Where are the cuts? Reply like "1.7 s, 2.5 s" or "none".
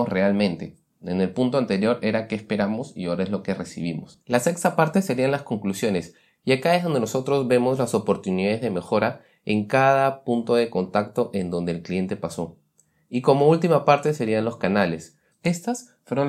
4.2 s, 15.3 s

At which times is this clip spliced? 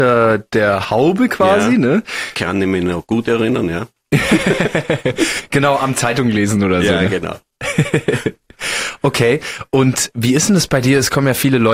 10.1 s

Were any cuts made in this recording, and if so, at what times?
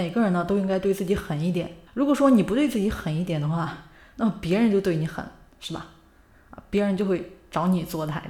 1.9 s

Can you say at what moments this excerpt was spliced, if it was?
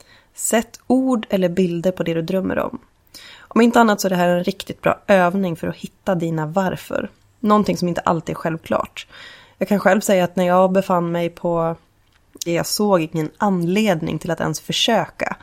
12.5 s

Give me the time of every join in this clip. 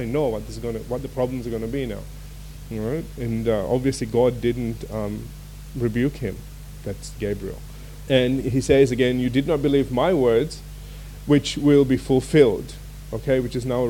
8.1 s

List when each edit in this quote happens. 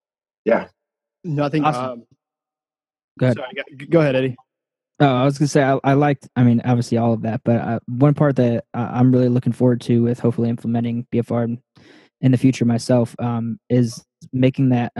none

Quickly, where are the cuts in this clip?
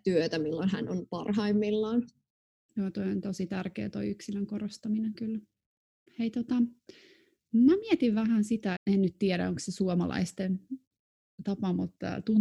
6.1 s, 8.8 s

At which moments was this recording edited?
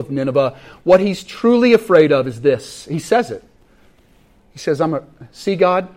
none

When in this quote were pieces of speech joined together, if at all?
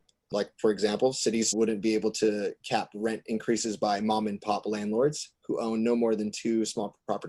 1.5 s

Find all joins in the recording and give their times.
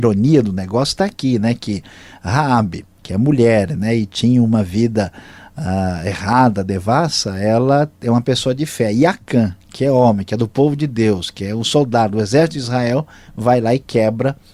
3.0 s

